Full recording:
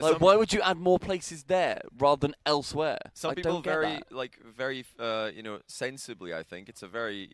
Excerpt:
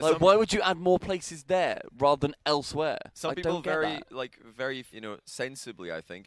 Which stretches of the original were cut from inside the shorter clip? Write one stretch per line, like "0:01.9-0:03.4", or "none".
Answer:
0:04.9-0:05.3